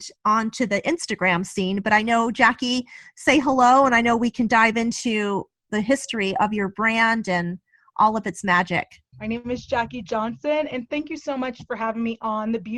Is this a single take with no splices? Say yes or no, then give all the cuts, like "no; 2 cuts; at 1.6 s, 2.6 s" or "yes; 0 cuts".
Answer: no; 1 cut; at 9.1 s